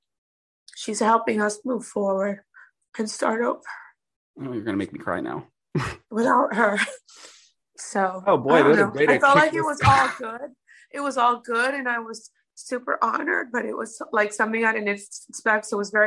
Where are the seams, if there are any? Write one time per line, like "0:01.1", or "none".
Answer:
none

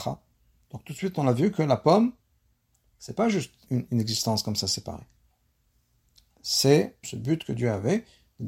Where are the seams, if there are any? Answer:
0:03.7
0:07.0

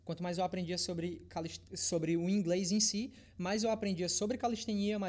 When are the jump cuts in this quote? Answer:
none

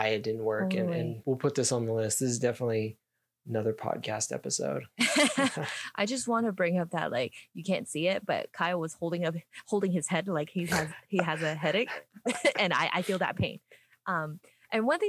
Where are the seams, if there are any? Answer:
0:01.2

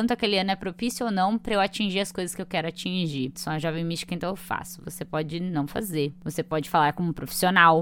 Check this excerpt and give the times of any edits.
0:03.3

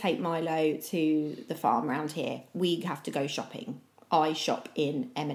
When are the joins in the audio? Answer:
none

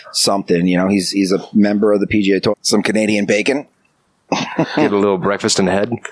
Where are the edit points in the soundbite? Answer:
0:02.5
0:04.3

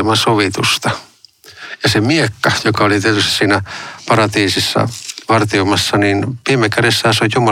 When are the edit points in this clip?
none

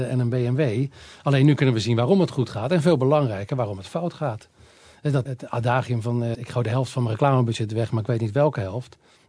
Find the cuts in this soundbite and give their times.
0:05.3
0:06.3

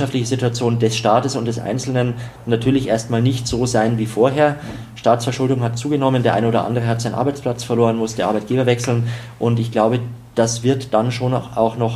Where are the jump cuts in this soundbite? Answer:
none

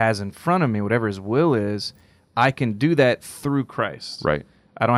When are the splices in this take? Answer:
none

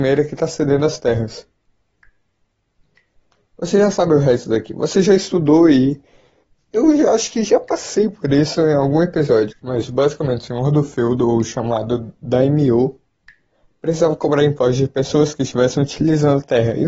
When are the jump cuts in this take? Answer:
0:09.5

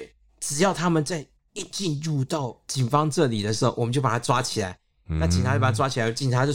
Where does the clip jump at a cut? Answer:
none

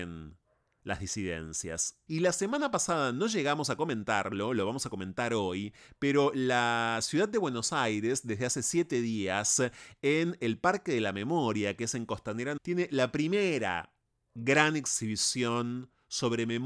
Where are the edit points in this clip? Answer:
0:02.1
0:12.6

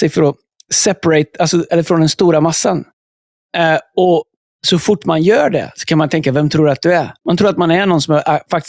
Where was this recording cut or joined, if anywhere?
0:01.7
0:07.2

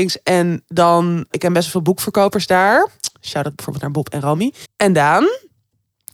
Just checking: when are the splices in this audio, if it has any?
0:01.3
0:04.6

